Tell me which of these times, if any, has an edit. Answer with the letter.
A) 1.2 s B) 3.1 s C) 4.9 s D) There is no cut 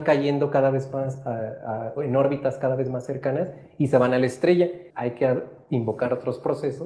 C